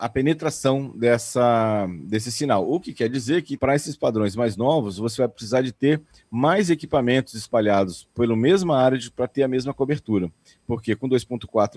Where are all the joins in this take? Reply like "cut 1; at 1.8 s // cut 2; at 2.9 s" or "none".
cut 1; at 3.6 s